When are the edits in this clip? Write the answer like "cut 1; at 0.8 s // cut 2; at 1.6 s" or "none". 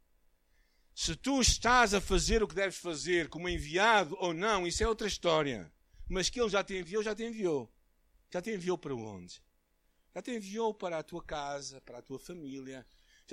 none